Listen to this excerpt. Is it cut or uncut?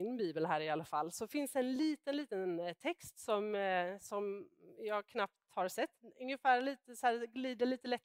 uncut